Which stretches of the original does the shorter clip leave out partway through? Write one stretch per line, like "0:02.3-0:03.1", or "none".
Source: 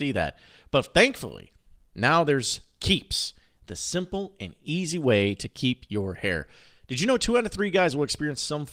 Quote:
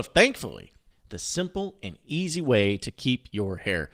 0:01.7-0:03.5